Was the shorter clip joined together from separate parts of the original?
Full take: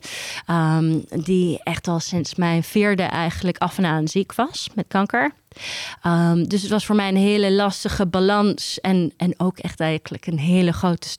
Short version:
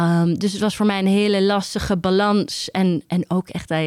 no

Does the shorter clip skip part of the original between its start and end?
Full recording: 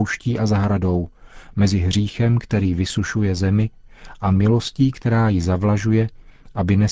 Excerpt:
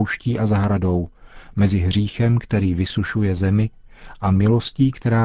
no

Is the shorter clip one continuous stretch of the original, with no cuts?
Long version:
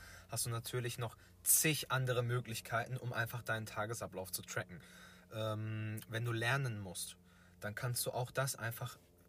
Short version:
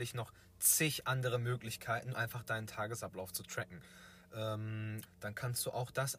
no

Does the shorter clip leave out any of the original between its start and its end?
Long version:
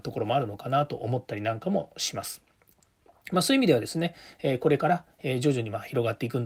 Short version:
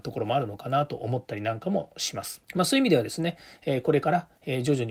yes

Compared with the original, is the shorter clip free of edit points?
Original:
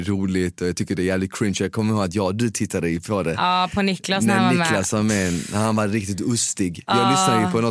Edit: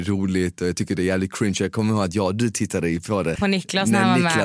no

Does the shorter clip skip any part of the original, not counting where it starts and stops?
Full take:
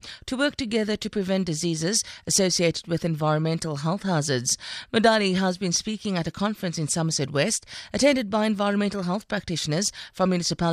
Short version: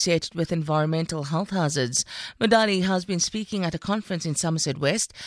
no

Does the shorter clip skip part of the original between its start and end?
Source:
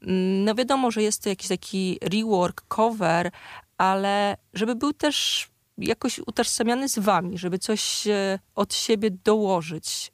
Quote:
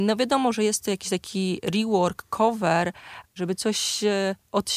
yes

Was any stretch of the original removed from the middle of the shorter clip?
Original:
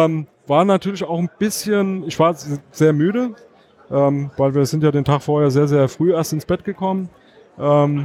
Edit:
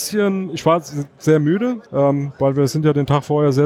yes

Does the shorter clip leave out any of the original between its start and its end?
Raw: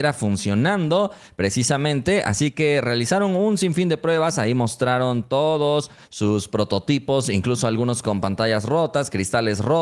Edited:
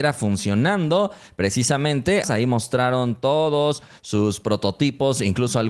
yes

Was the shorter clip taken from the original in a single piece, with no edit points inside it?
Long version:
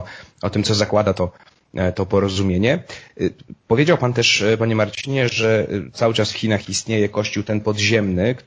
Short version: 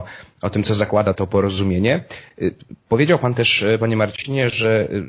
no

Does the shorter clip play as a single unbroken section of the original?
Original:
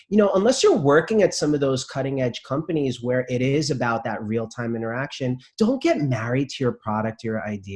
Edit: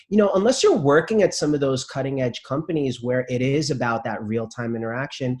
yes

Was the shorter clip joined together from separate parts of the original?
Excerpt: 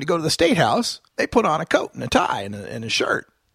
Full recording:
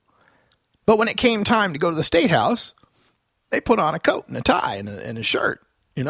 yes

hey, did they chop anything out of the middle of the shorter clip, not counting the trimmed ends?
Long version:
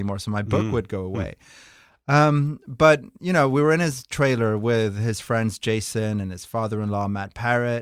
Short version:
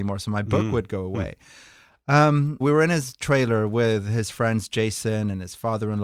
yes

